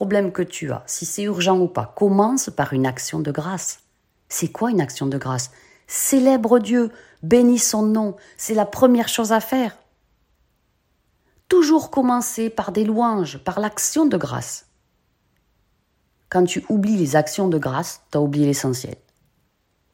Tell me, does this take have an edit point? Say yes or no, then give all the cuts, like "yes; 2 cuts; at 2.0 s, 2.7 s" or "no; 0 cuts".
no; 0 cuts